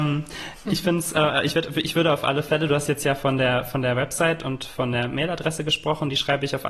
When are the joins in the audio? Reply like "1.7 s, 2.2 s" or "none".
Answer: none